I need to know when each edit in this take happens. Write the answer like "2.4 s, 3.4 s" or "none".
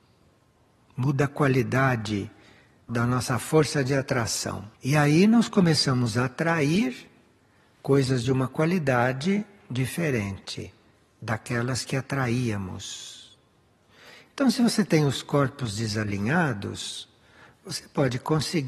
4.7 s